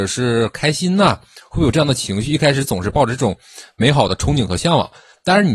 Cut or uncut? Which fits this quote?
uncut